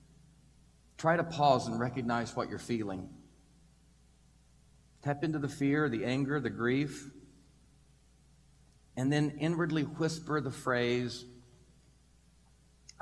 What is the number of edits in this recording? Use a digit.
0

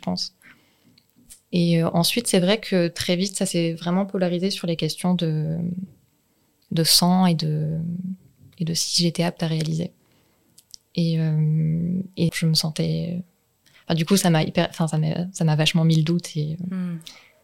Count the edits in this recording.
1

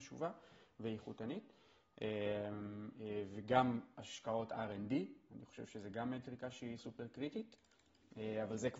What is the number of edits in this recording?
1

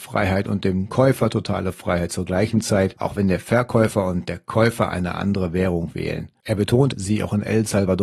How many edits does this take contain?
1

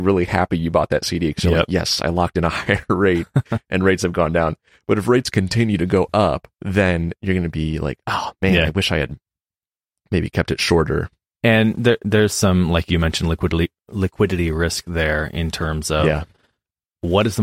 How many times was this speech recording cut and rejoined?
1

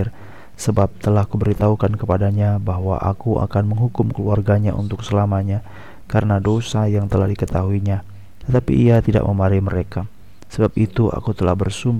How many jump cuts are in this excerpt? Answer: 1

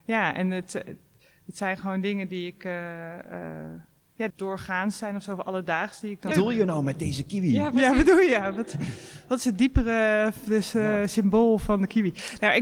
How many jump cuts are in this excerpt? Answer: 2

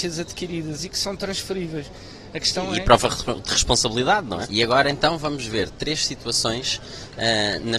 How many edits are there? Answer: 1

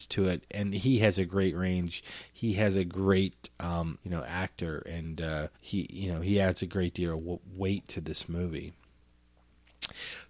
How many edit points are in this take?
2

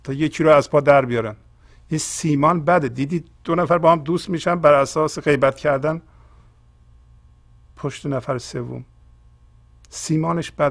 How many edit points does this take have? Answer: 0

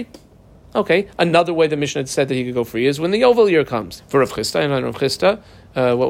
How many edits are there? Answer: 1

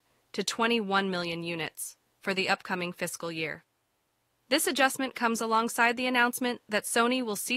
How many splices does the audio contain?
0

